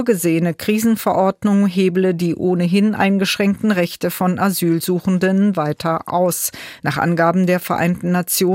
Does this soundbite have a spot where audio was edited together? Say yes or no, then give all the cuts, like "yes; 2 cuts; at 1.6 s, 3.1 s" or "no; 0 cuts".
yes; 1 cut; at 6.8 s